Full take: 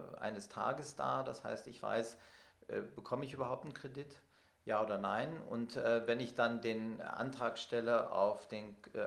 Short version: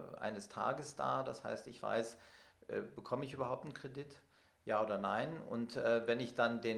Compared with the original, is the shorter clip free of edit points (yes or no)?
yes